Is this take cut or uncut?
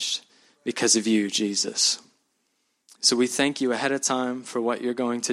uncut